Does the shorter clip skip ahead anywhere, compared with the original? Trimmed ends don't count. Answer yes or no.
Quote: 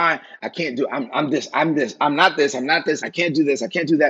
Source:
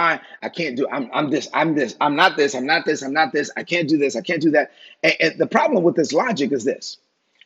yes